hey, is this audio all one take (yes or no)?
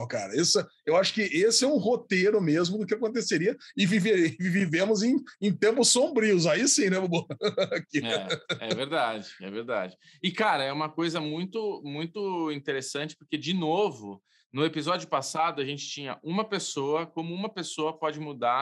yes